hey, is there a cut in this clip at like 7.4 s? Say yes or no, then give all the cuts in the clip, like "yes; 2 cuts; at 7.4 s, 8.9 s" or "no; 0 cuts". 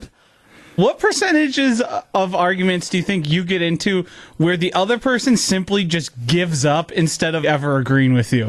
yes; 1 cut; at 7.4 s